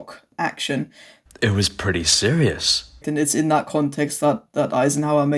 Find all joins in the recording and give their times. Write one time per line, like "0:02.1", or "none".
0:01.3
0:03.0